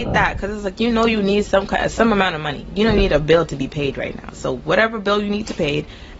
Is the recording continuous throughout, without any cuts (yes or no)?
yes